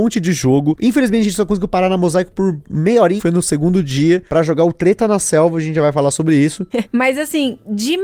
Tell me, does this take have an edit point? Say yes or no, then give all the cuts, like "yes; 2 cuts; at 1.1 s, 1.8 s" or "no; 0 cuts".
yes; 2 cuts; at 3.2 s, 6.7 s